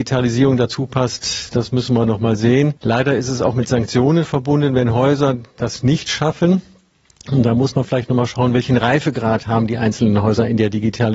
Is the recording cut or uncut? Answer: cut